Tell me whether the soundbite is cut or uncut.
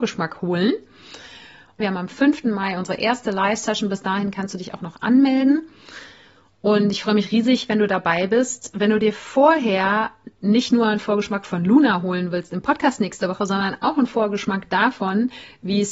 cut